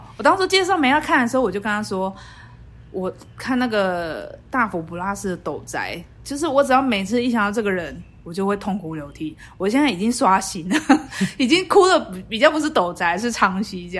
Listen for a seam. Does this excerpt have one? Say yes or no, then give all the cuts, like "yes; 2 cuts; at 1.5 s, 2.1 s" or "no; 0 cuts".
no; 0 cuts